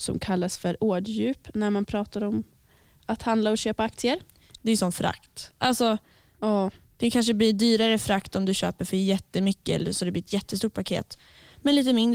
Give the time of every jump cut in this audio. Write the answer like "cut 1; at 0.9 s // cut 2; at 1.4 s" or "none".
cut 1; at 4.6 s

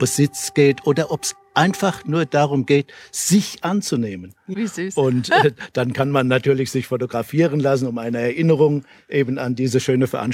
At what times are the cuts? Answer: cut 1; at 4.5 s

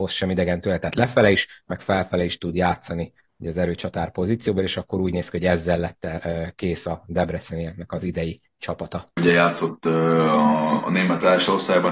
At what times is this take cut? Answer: cut 1; at 9.2 s

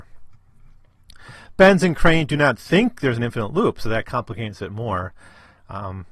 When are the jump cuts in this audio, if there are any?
none

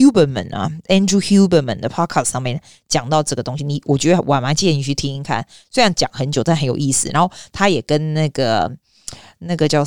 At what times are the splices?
none

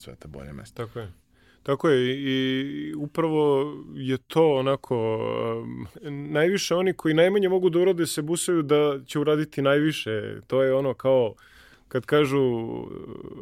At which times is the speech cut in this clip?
none

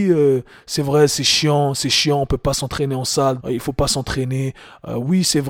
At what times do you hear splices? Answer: cut 1; at 3.4 s

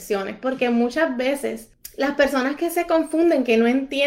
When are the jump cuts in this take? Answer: none

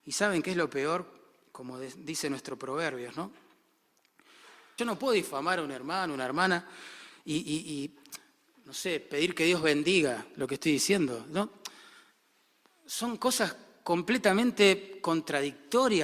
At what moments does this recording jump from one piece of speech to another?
cut 1; at 4.8 s

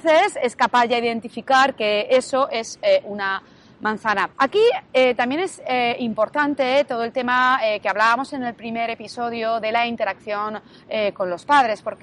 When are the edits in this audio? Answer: cut 1; at 4.3 s

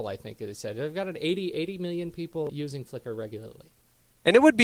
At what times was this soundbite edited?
cut 1; at 2.5 s

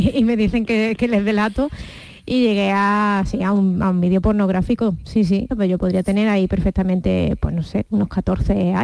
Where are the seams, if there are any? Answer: cut 1; at 5.5 s

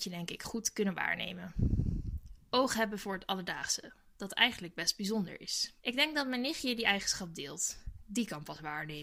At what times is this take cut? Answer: cut 1; at 5.8 s

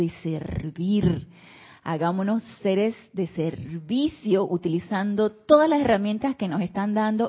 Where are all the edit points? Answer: none

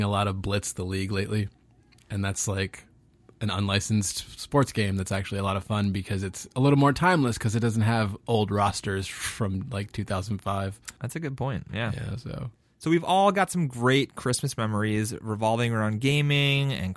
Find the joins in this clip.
none

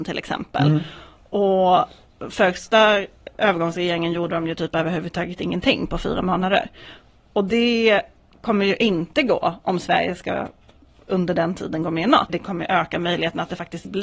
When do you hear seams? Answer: cut 1; at 12.3 s

